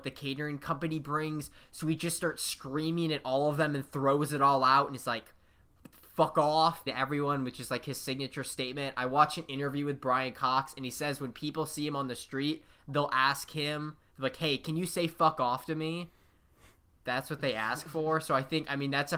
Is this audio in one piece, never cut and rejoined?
no; 1 cut; at 6.9 s

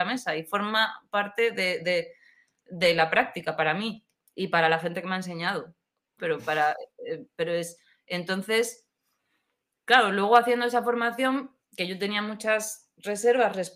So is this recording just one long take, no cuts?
no; 1 cut; at 6.2 s

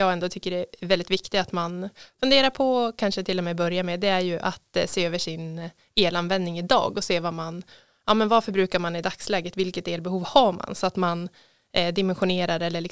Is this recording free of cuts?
yes; 0 cuts

